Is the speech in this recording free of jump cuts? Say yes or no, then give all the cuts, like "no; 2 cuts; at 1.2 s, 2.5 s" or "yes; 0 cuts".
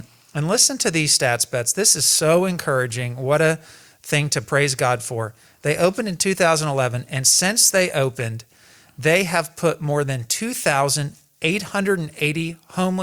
yes; 0 cuts